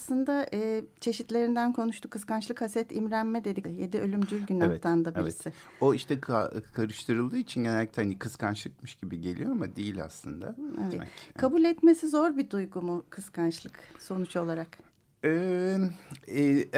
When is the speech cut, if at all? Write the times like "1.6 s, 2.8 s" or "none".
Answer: 3.6 s, 10.9 s